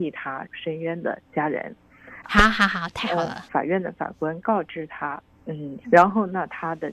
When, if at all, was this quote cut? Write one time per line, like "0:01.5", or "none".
0:02.2
0:03.5
0:05.8